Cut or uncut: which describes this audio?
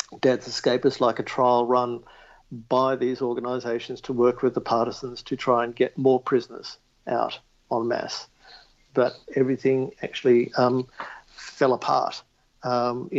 uncut